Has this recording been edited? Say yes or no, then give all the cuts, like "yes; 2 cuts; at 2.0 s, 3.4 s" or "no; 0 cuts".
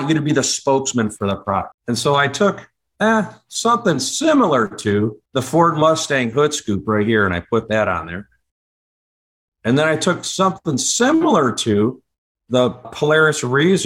yes; 3 cuts; at 1.7 s, 5.3 s, 12.8 s